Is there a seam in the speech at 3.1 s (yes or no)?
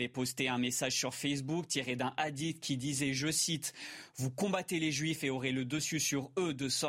no